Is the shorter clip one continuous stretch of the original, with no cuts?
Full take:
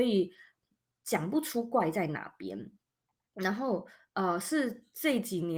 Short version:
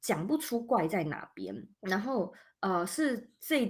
no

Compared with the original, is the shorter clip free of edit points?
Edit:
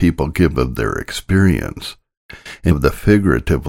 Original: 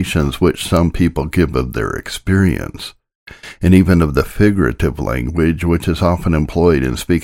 no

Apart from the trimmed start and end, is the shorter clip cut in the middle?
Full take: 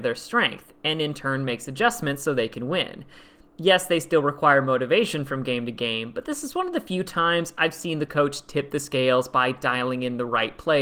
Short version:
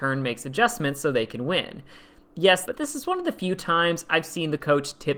yes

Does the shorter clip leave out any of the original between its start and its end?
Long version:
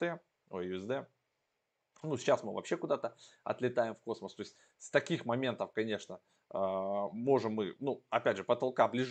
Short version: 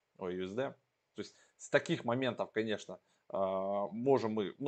yes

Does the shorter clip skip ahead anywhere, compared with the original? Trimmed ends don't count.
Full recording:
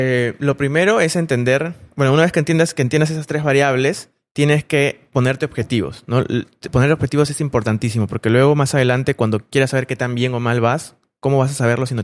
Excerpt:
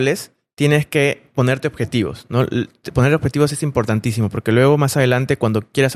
no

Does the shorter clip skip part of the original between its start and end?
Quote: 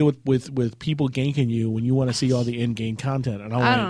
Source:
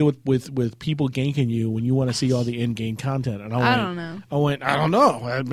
no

